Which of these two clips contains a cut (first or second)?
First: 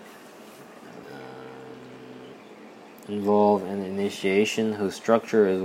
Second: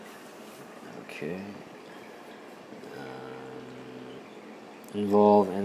first